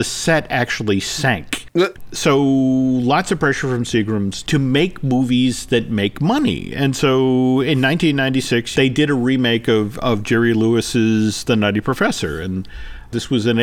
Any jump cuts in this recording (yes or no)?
no